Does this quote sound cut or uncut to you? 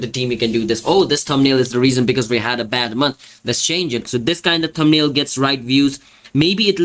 cut